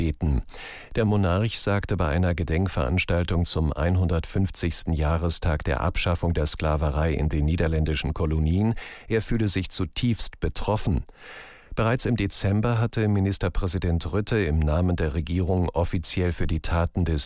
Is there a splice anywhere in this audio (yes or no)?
no